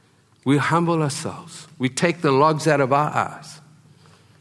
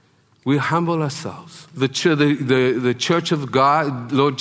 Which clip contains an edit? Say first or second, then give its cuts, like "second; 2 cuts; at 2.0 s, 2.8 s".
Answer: second; 1 cut; at 1.7 s